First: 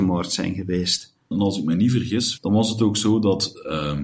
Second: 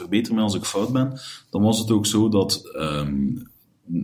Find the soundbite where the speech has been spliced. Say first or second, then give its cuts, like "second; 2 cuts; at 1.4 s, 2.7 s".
first; 2 cuts; at 1.3 s, 2.4 s